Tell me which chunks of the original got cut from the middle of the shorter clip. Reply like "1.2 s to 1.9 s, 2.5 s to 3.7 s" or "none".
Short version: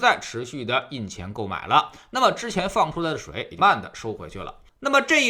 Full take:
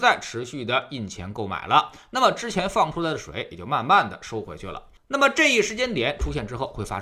3.6 s to 3.9 s